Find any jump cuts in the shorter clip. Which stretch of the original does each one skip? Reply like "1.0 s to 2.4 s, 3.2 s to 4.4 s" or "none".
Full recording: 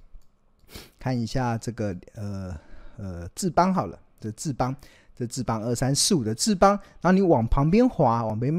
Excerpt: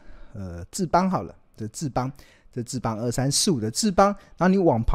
none